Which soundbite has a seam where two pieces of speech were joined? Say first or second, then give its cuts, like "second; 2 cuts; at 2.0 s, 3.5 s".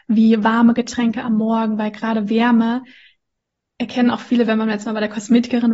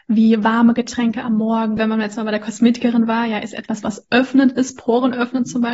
second; 1 cut; at 1.8 s